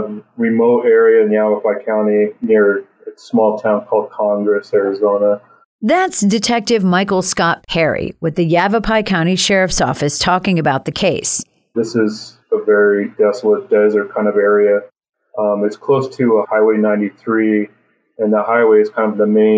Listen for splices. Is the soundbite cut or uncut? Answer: cut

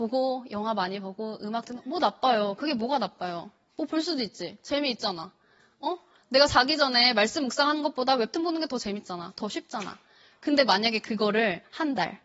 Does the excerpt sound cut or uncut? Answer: uncut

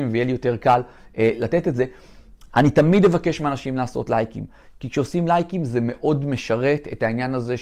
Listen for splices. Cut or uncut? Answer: cut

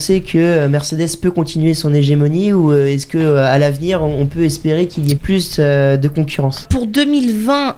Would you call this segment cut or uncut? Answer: cut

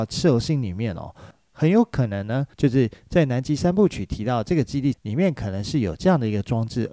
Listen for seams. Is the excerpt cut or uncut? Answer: cut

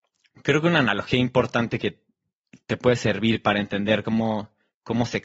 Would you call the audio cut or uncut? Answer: uncut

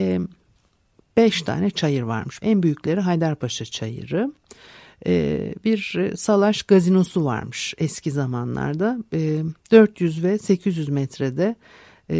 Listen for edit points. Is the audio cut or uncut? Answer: cut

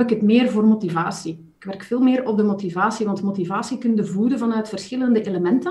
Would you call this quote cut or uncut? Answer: uncut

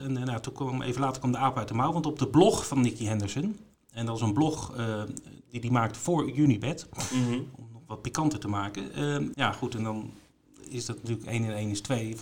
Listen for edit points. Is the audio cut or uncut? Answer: cut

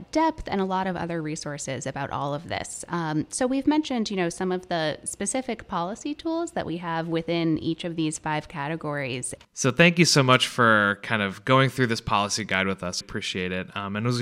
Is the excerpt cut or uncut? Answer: cut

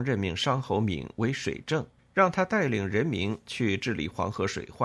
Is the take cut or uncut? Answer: cut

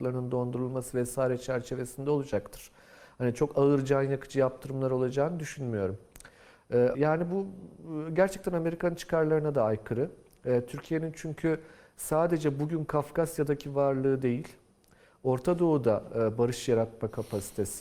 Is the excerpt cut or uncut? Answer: cut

